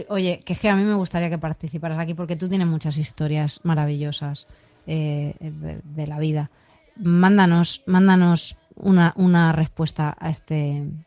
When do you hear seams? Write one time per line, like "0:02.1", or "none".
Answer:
none